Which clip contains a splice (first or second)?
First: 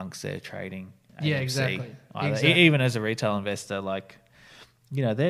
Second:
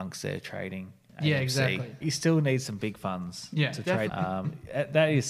second